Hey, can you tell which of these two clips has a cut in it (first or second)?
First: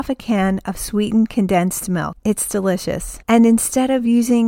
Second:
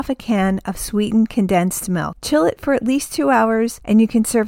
first